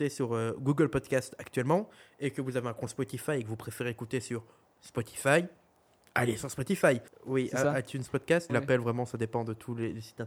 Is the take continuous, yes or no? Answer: no